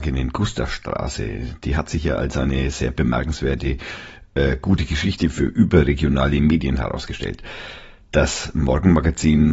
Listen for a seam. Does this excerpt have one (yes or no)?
no